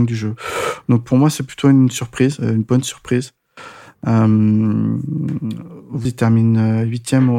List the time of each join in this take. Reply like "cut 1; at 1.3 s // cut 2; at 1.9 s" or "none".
cut 1; at 1.0 s // cut 2; at 6.0 s